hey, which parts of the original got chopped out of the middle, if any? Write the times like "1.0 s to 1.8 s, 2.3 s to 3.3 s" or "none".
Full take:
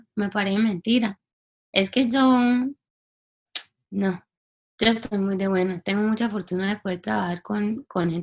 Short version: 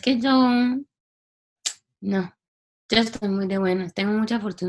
none

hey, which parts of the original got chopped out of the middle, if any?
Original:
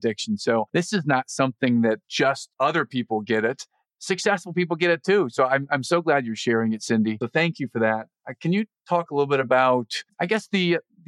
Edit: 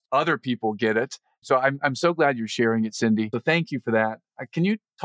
3.9 s to 5.3 s

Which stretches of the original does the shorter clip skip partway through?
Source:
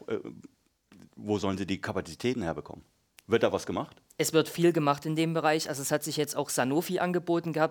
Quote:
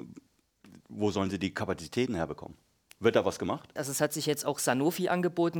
4.0 s to 5.7 s

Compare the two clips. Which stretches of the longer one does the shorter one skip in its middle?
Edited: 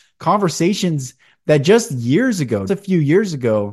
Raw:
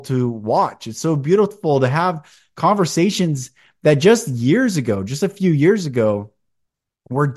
5.0 s to 5.2 s

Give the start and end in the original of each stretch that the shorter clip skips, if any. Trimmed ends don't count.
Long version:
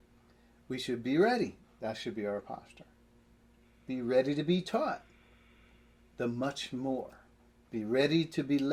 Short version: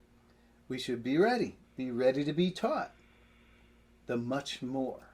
1.7 s to 3.8 s

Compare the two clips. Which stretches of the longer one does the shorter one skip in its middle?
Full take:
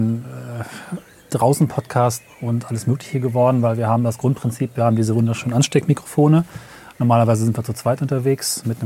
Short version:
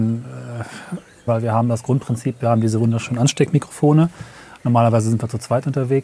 1.3 s to 3.6 s

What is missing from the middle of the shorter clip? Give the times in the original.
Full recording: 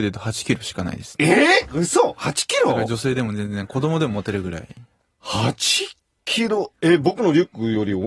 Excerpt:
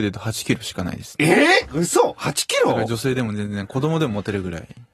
none

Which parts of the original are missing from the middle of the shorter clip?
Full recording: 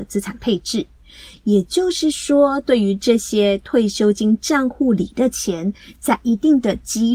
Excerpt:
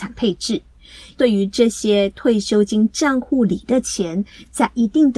1.4 s to 2.6 s

